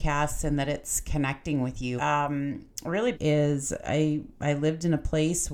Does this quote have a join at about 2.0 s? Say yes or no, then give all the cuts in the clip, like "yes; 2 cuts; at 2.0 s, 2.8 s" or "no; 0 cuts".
yes; 2 cuts; at 2.0 s, 3.1 s